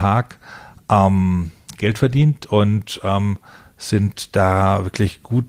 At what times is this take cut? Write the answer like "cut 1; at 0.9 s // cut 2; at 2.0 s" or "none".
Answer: none